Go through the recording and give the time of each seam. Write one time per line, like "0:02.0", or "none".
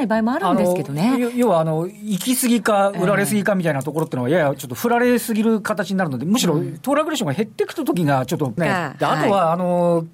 0:08.6